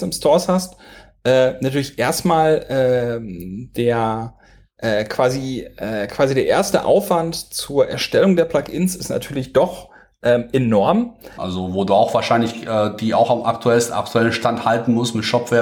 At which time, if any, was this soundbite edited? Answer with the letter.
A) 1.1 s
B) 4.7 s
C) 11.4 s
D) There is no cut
C